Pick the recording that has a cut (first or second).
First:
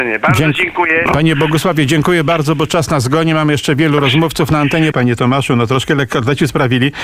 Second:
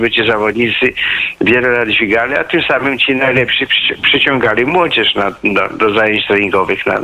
first